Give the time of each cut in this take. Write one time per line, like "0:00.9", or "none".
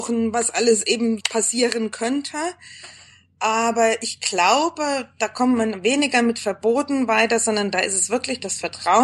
0:01.2